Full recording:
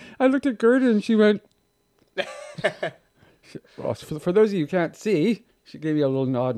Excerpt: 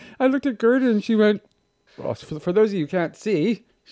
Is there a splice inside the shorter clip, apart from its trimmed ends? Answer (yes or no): yes